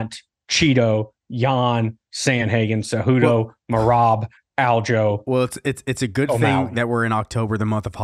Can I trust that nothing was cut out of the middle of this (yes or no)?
yes